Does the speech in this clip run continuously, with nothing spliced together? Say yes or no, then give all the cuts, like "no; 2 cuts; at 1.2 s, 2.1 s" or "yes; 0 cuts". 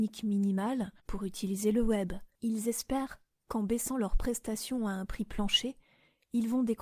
no; 2 cuts; at 1.0 s, 2.4 s